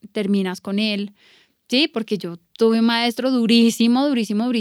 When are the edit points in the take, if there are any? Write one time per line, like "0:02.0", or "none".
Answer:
none